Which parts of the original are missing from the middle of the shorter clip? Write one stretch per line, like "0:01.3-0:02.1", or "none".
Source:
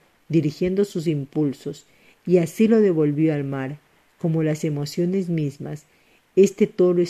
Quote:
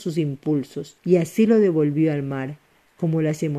0:01.9-0:02.2